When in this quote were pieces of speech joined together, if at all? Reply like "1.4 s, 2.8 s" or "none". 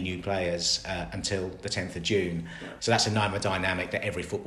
2.8 s